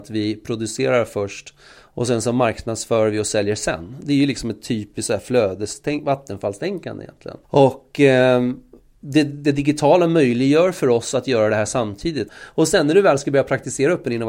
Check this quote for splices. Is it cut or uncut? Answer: cut